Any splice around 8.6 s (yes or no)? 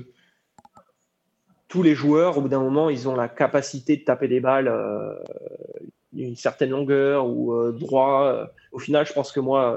no